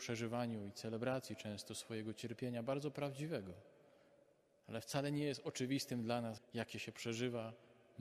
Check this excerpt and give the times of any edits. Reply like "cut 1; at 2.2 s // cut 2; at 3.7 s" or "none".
cut 1; at 6.4 s